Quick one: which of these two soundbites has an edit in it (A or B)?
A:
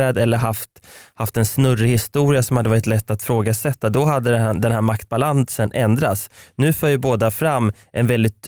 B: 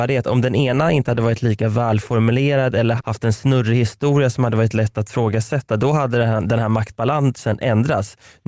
B